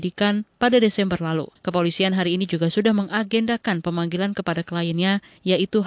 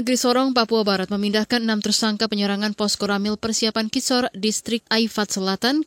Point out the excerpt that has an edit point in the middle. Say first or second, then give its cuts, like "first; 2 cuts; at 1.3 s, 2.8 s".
first; 1 cut; at 1.6 s